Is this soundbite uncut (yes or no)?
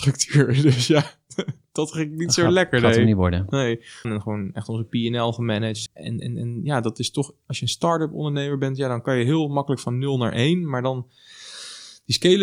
no